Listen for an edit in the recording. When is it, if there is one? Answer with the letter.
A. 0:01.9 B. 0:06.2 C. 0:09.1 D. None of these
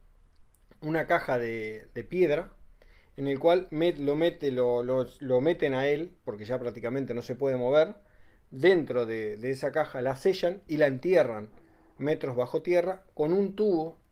D